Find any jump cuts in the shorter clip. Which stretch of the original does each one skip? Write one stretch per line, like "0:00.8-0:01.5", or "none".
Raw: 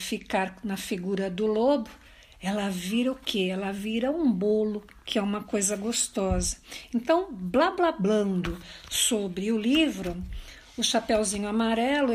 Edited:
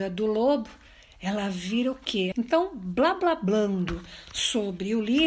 0:03.5-0:06.9